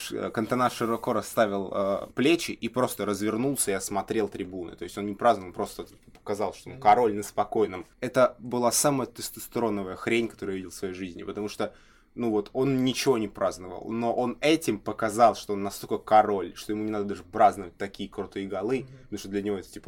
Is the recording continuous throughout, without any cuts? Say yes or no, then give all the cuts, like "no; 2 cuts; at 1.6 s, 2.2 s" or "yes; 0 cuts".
no; 1 cut; at 7.9 s